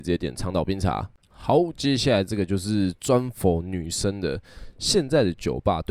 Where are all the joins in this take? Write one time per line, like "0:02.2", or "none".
none